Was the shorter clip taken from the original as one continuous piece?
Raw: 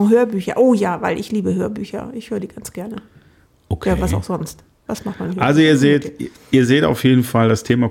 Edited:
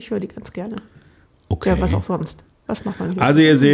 yes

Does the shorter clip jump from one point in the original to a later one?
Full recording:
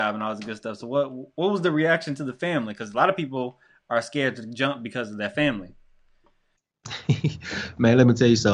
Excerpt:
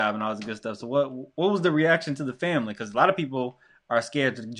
no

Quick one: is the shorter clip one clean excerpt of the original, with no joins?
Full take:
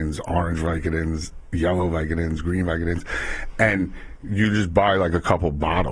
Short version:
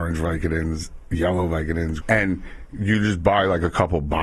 no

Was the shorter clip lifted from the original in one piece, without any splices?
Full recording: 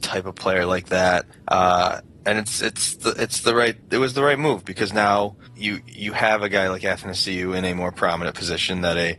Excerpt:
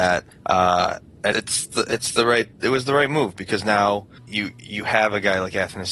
no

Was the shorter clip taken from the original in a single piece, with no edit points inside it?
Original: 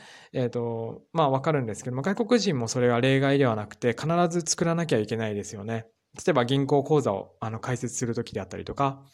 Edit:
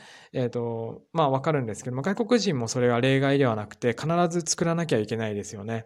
yes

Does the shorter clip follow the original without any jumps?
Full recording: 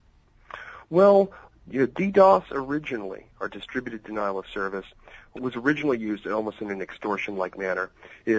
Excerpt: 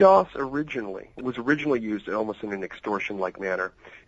no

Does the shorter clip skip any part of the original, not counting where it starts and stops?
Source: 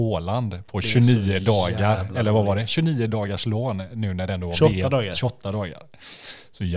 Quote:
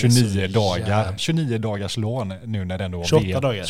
yes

